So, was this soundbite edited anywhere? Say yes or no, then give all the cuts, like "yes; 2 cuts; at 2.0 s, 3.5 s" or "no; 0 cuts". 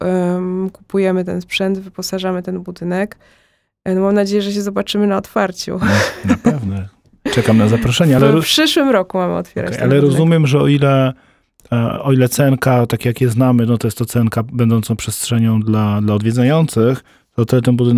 no; 0 cuts